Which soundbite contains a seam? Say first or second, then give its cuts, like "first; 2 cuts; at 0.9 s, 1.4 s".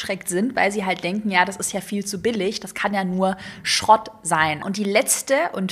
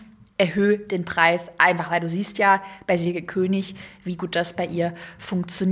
first; 1 cut; at 4.6 s